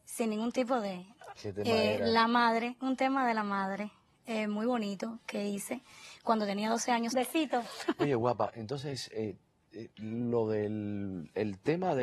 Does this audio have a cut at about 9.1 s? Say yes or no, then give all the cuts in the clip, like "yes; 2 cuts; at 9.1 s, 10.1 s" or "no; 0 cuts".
no; 2 cuts; at 1.4 s, 7.1 s